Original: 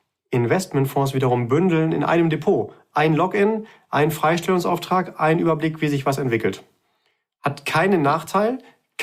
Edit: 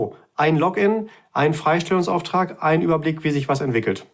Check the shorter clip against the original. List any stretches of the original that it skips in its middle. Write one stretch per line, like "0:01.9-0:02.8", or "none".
none